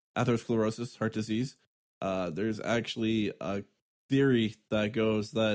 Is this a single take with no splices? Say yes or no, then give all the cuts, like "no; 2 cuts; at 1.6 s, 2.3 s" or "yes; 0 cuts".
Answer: yes; 0 cuts